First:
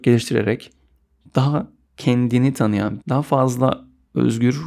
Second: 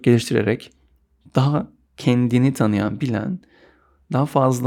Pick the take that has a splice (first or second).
first